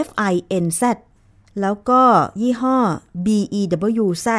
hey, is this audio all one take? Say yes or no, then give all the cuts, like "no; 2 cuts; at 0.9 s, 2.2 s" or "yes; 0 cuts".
yes; 0 cuts